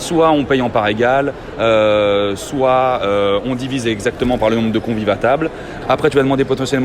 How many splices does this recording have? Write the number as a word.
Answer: one